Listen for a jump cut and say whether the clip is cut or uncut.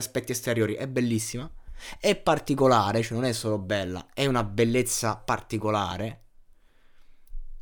uncut